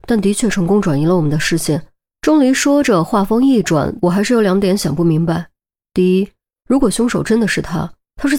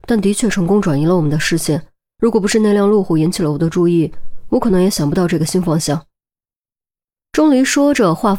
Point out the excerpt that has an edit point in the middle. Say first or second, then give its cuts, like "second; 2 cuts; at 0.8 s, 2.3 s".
first; 2 cuts; at 2.1 s, 4.0 s